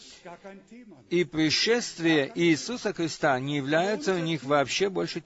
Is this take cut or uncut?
uncut